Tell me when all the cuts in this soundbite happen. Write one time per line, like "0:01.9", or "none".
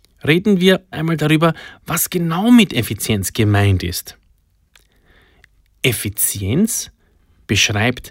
0:00.9